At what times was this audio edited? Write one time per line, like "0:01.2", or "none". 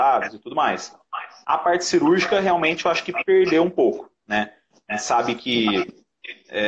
0:01.4